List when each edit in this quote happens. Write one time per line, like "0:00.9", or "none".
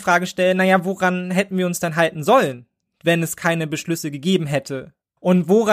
none